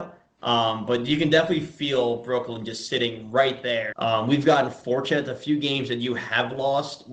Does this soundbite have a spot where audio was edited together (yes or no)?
yes